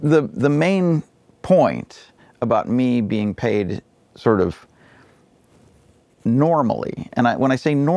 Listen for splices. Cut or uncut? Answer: uncut